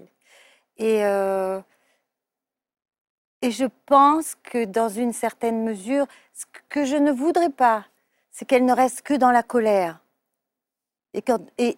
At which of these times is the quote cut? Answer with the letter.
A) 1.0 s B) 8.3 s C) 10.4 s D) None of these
D